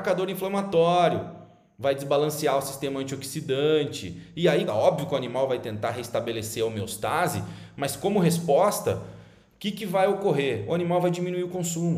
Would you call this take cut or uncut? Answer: cut